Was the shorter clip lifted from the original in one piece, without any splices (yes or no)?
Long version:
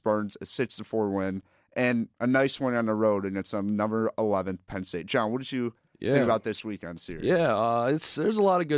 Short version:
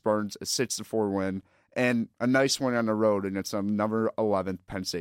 yes